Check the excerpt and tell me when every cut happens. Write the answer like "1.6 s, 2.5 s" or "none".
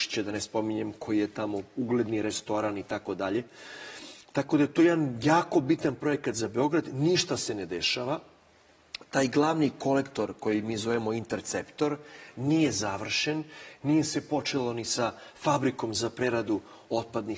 none